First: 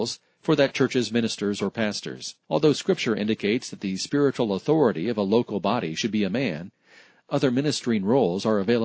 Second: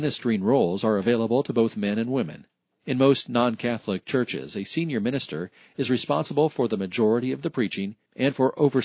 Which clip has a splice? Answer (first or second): first